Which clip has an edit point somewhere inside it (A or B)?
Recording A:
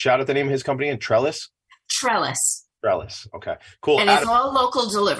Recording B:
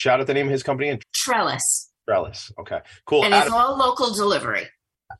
B